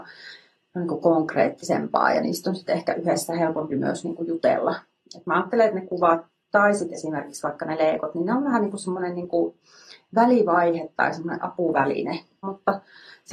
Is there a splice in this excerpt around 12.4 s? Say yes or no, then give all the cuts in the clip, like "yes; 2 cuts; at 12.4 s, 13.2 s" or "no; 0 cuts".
yes; 1 cut; at 12.4 s